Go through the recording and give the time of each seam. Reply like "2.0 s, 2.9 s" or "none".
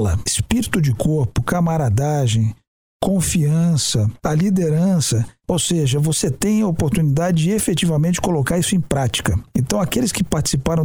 none